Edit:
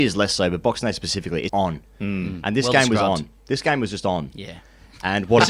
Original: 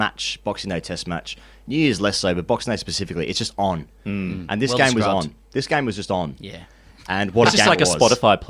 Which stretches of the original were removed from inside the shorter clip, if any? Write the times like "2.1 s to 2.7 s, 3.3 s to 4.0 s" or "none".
3.3 s to 3.5 s